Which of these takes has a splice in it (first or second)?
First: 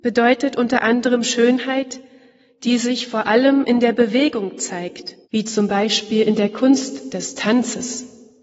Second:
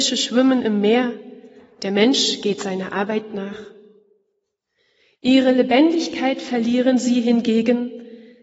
first